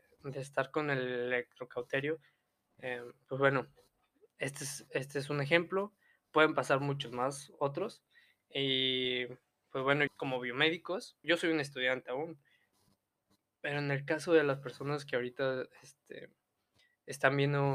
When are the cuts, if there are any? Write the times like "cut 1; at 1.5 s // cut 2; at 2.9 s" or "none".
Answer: cut 1; at 10.1 s // cut 2; at 11.2 s